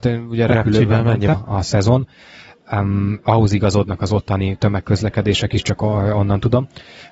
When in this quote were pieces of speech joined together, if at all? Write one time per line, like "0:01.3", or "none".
0:01.3